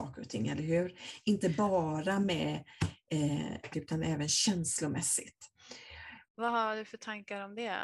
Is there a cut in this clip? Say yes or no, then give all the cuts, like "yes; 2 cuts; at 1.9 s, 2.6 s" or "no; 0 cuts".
yes; 2 cuts; at 3.7 s, 6.3 s